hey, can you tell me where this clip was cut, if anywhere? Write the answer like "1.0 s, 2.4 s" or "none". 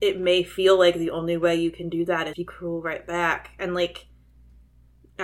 2.3 s